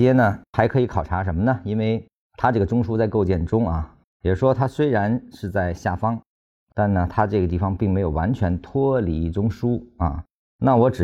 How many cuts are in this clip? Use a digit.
1